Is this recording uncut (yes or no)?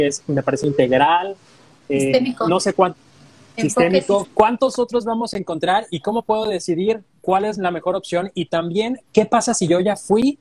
no